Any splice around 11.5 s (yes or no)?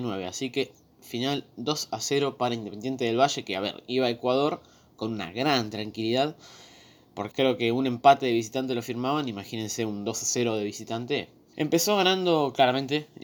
yes